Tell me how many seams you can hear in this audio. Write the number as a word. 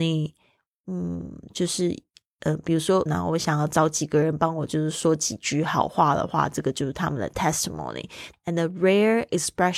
two